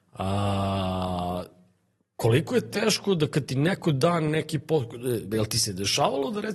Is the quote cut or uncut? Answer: uncut